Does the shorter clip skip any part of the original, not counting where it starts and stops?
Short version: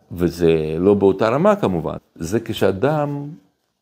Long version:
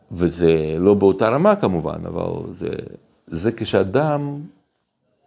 yes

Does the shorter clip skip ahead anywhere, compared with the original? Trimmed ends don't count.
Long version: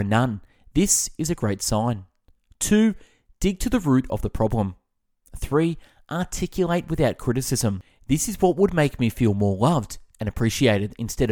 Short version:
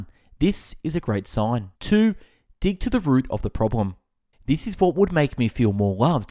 yes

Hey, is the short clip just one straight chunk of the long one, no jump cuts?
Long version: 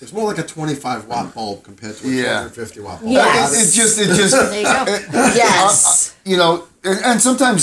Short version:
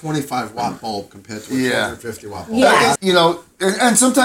no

